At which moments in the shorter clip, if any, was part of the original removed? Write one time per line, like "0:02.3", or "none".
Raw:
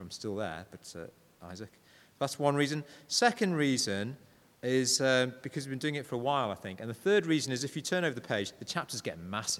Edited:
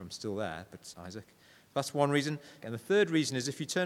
0:00.9
0:02.6